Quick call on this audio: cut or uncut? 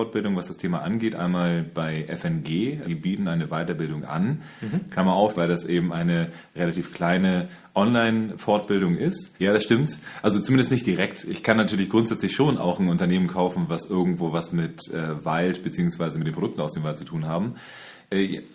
cut